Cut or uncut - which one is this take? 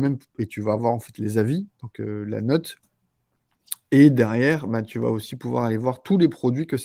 uncut